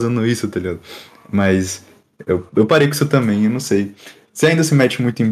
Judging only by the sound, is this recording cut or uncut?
uncut